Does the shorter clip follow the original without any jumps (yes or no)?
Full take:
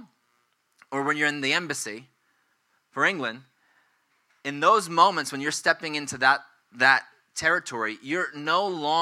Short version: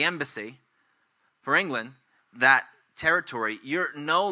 no